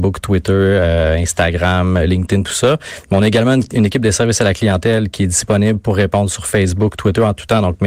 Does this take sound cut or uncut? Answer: uncut